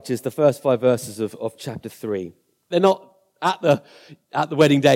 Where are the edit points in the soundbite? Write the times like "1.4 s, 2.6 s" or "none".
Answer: 2.7 s